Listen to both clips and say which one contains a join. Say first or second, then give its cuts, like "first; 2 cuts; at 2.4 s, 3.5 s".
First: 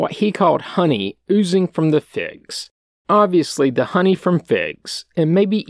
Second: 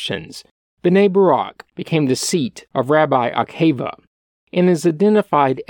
first; 1 cut; at 2.9 s